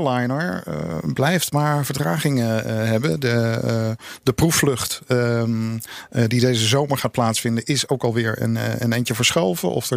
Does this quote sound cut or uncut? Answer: uncut